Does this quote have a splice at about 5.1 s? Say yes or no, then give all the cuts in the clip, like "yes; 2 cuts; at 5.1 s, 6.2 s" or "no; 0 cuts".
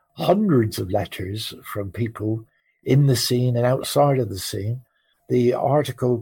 no; 0 cuts